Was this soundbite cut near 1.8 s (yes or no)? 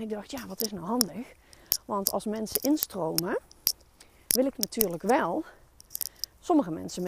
no